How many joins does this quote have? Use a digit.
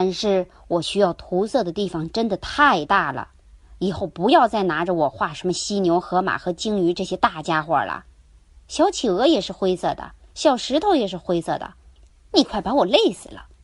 1